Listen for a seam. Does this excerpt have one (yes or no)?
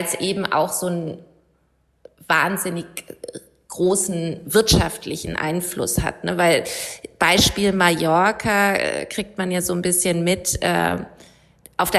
no